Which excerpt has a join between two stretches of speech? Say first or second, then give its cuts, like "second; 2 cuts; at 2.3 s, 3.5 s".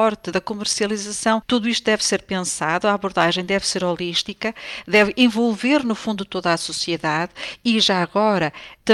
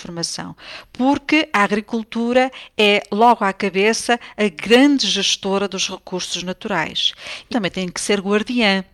second; 1 cut; at 7.5 s